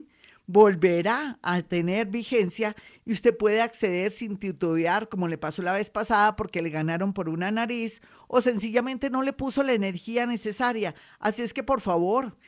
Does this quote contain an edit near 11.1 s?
no; 0 cuts

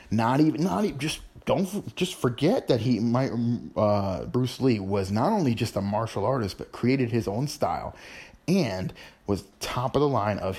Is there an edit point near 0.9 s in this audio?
no; 0 cuts

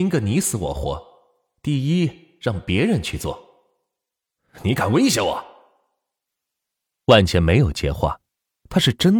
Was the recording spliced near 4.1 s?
no; 0 cuts

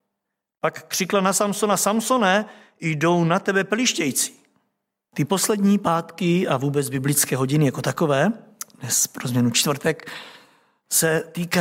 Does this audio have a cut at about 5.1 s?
yes; 1 cut; at 5.1 s

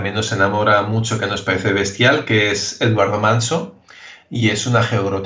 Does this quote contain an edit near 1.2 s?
no; 0 cuts

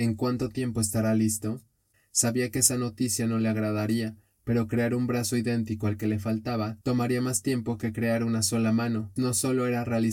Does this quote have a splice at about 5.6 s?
no; 2 cuts; at 1.9 s, 9.2 s

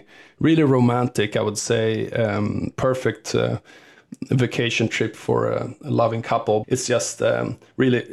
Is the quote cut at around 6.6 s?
yes; 1 cut; at 6.6 s

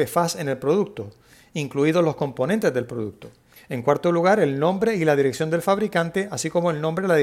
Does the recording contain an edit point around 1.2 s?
no; 1 cut; at 3.6 s

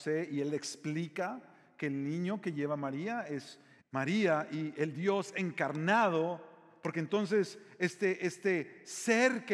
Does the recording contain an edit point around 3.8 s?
yes; 1 cut; at 3.8 s

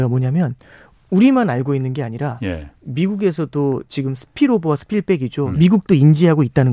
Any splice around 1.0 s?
no; 1 cut; at 5.5 s

